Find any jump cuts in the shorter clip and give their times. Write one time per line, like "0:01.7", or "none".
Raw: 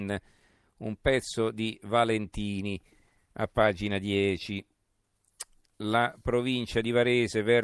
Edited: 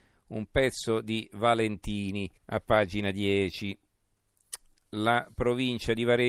0:02.4